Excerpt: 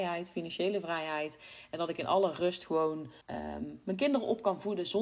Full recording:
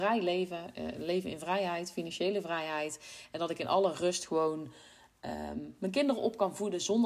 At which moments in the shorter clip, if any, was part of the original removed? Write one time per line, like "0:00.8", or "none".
0:03.2